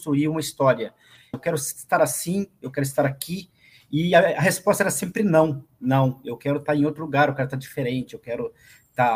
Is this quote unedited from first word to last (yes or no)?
no